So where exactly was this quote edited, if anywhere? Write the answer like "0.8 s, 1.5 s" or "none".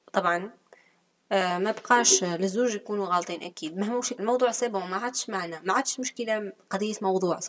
4.2 s